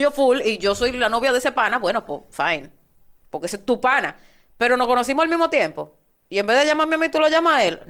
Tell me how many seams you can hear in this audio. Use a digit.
0